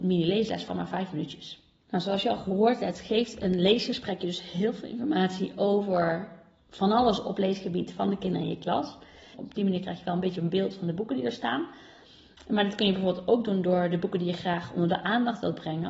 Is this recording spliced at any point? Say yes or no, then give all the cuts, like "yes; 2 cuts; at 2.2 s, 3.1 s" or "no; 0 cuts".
yes; 1 cut; at 9.3 s